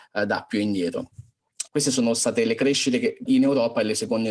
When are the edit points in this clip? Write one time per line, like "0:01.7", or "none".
0:01.7
0:03.3